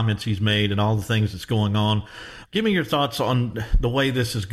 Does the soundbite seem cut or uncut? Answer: cut